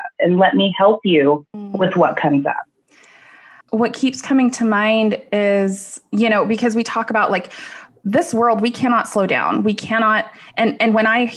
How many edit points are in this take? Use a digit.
1